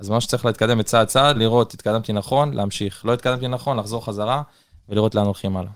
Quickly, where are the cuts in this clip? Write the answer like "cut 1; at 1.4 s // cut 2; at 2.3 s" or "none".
cut 1; at 1.3 s